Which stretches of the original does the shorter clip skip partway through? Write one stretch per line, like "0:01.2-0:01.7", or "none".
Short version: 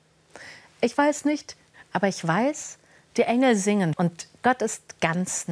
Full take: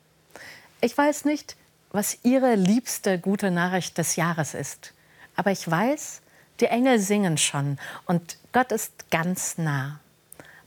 0:01.7-0:05.2
0:07.4-0:08.0